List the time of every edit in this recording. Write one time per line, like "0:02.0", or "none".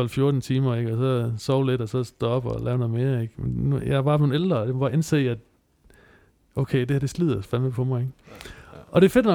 none